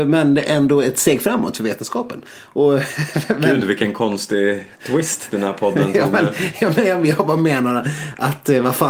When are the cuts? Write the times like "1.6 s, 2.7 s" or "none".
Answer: 4.7 s